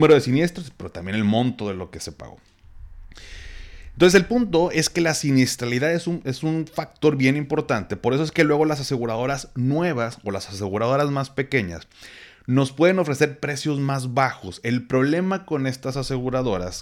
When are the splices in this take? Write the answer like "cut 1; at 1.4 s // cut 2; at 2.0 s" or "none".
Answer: none